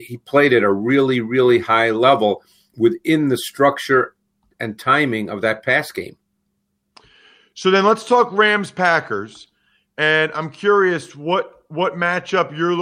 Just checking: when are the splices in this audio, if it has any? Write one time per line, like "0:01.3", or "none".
none